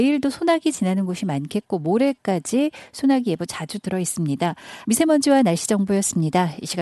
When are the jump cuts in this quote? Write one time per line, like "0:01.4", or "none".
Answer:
0:04.8